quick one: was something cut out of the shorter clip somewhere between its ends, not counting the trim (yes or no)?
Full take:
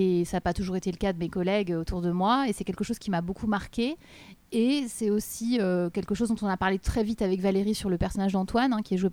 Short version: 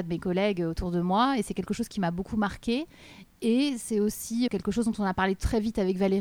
yes